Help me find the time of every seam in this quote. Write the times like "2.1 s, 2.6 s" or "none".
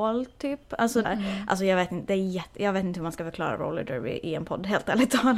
1.0 s